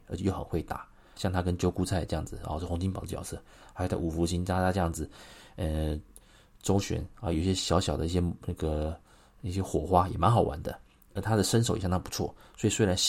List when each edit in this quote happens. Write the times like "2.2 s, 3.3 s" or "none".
1.2 s